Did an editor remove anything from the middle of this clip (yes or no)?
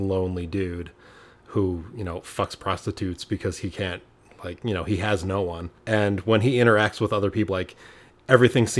yes